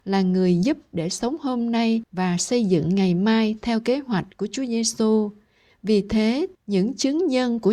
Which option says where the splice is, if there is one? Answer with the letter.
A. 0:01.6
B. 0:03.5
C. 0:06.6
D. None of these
C